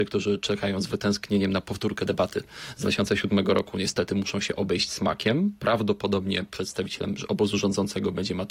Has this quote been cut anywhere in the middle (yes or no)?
no